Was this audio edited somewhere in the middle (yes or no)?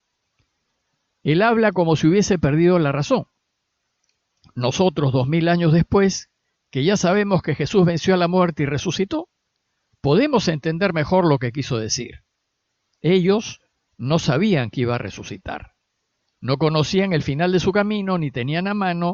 yes